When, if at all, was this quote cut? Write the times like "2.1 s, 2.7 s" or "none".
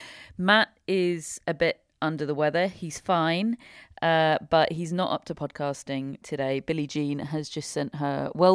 none